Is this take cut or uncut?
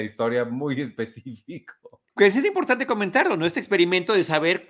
cut